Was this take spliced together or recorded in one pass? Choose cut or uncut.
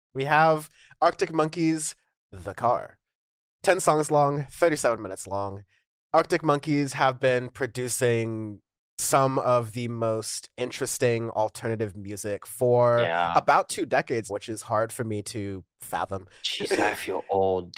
cut